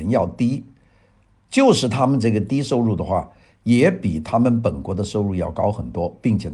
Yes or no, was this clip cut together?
no